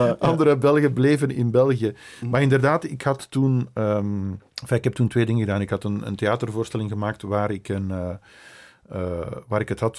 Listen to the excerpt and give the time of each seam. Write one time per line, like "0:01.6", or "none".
0:04.5